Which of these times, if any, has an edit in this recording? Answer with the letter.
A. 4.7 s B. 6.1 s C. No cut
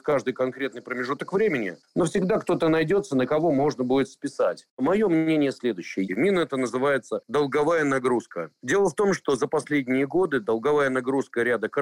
B